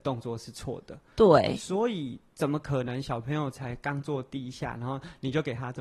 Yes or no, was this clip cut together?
no